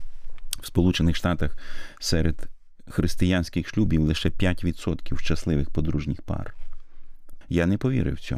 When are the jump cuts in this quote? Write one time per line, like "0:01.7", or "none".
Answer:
0:07.4